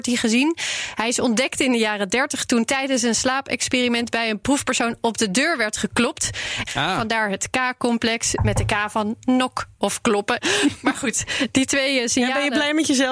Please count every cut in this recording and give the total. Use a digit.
2